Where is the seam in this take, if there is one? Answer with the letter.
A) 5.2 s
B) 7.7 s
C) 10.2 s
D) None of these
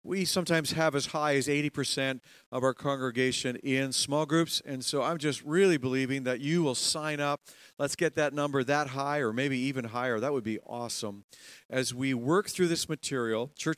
D